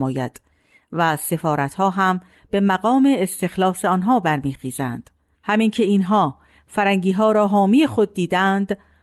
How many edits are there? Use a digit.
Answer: 1